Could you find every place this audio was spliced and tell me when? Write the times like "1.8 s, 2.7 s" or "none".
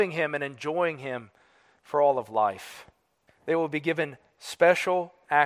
3.3 s